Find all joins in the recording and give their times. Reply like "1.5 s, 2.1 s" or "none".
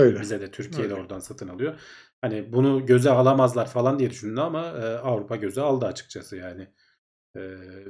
none